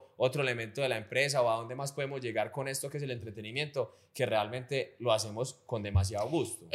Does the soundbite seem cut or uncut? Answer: uncut